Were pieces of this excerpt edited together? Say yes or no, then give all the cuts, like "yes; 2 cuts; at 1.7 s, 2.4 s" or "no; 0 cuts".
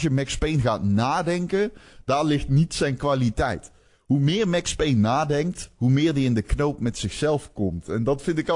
no; 0 cuts